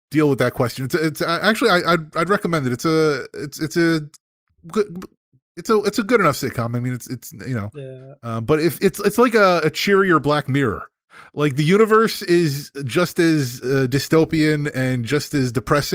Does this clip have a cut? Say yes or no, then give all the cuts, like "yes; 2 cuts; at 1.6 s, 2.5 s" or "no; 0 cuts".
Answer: no; 0 cuts